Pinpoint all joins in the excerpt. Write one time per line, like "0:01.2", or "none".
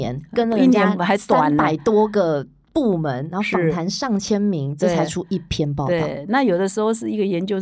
none